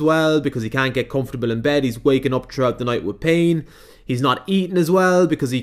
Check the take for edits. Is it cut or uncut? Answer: uncut